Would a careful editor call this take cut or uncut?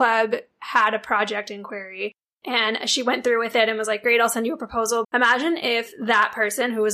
cut